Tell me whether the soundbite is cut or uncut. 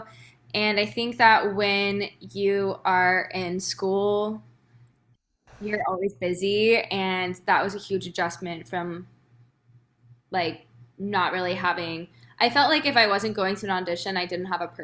uncut